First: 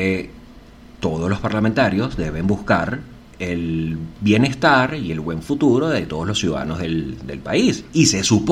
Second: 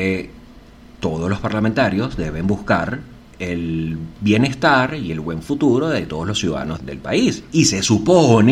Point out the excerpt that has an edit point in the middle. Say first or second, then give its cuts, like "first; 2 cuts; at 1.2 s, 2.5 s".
second; 1 cut; at 6.8 s